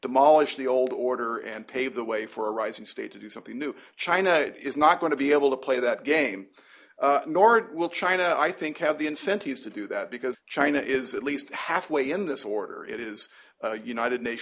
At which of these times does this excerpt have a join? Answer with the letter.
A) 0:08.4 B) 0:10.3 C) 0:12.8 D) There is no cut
B